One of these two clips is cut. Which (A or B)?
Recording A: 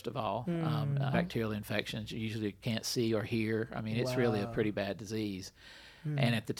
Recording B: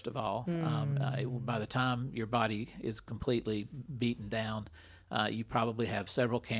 A